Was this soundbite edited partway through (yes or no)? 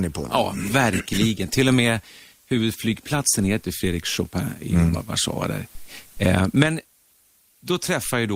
no